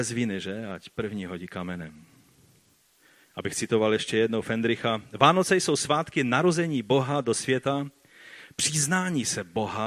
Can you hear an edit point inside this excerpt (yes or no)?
no